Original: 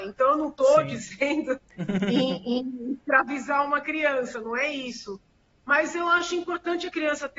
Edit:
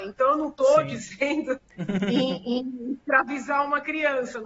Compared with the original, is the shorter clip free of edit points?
yes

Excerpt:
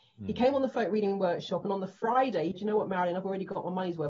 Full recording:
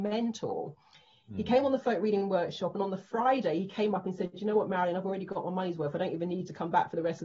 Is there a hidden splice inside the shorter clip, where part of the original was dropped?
yes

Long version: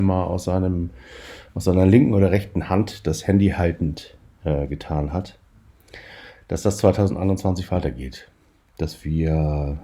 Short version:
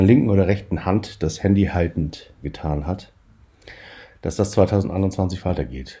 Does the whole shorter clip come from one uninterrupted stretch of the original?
no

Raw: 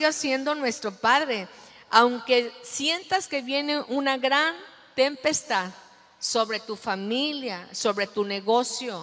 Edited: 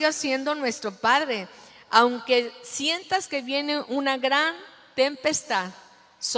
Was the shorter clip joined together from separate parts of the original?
no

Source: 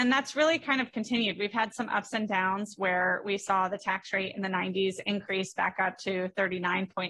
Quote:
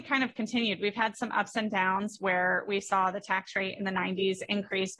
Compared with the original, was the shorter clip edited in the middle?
no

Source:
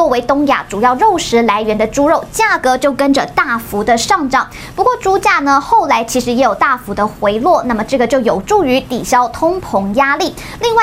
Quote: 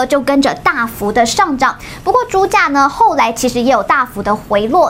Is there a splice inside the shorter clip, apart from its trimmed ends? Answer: no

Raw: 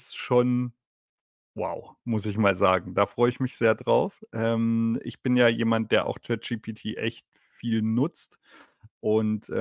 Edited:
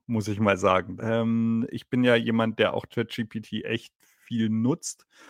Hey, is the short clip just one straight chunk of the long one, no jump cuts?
no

